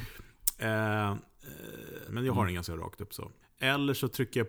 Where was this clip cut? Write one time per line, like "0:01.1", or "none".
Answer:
0:02.1
0:03.4